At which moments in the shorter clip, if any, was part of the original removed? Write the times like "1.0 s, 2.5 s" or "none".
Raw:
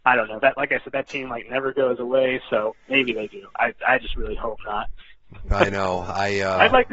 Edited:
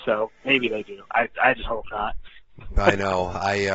1.6 s